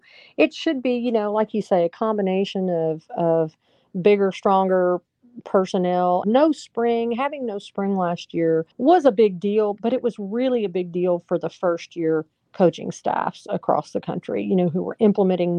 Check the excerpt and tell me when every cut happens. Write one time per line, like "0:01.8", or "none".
0:06.2
0:08.7